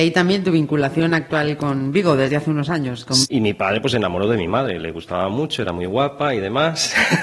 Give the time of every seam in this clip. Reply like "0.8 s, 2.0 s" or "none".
3.2 s